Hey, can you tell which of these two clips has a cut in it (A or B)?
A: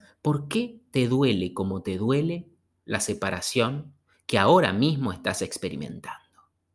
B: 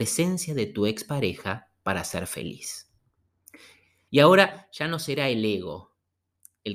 B